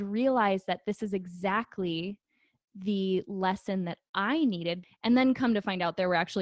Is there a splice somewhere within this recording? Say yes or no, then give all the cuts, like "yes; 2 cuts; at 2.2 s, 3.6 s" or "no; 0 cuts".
yes; 1 cut; at 4.8 s